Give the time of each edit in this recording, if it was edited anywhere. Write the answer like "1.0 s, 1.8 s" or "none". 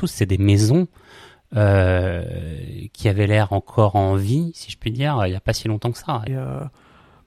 6.3 s